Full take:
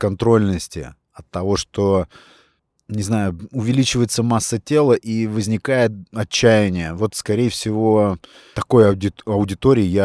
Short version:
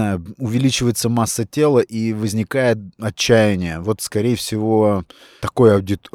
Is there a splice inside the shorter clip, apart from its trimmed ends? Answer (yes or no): no